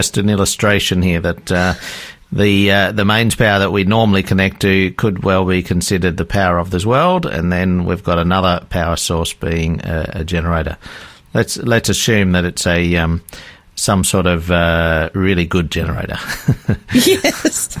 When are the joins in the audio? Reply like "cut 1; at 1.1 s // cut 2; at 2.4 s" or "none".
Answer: none